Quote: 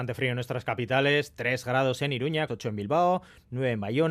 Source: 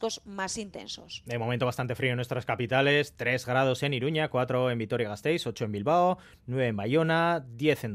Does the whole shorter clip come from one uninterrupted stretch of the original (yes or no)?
no